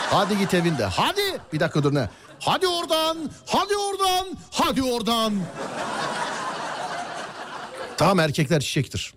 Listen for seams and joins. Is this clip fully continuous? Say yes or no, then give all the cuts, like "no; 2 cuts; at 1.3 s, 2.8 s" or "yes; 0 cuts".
yes; 0 cuts